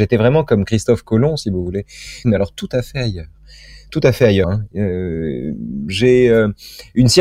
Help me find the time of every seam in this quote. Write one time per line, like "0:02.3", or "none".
0:02.2
0:04.4